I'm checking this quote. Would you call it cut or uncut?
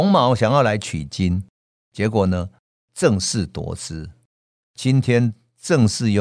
uncut